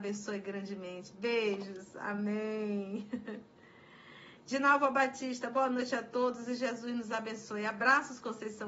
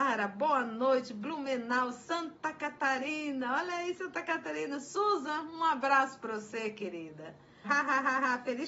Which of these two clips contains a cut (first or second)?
second